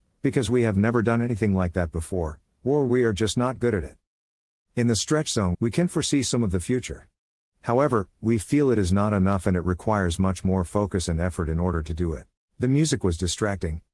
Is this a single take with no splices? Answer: no; 2 cuts; at 5.5 s, 12.4 s

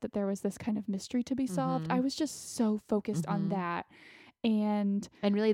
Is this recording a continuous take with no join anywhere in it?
yes; 0 cuts

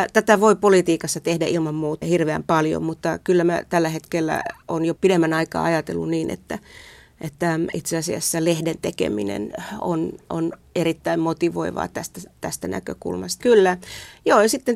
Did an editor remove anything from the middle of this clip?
yes; 2 cuts; at 2.0 s, 13.4 s

